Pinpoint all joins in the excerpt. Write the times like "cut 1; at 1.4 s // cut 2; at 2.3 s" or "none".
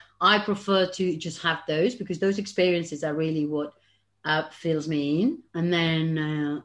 none